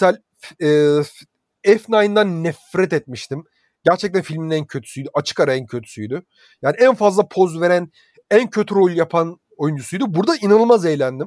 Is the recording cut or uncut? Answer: uncut